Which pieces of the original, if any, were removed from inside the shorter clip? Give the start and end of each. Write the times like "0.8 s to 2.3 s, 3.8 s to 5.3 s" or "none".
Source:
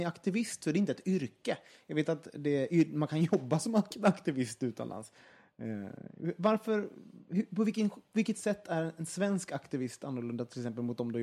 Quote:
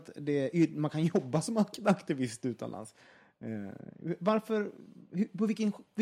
none